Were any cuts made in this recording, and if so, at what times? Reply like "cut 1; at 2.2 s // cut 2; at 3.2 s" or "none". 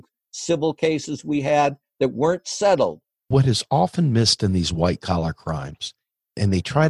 cut 1; at 3.2 s